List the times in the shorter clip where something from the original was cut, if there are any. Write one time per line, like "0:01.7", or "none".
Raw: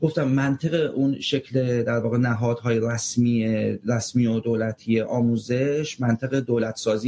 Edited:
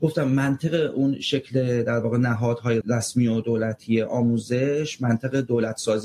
0:02.8